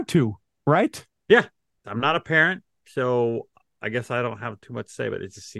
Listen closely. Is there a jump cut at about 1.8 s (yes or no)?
yes